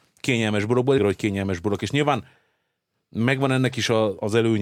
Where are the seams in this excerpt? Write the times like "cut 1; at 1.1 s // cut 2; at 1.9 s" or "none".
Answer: cut 1; at 1.0 s